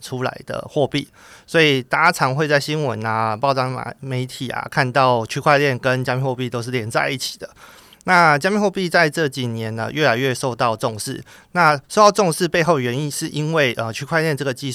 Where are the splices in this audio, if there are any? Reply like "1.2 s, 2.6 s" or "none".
none